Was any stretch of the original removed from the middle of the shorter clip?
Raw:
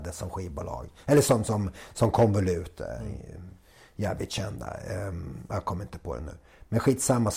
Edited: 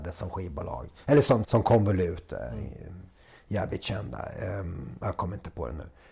yes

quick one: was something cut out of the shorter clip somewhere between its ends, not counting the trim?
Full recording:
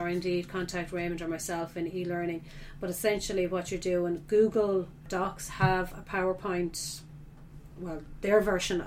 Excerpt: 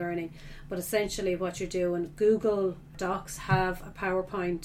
no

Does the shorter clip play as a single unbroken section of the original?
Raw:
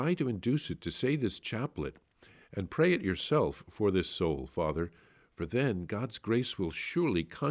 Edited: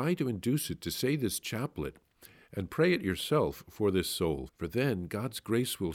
no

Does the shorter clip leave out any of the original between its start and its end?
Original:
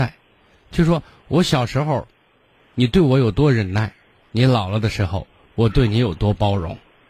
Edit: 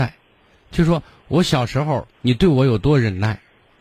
yes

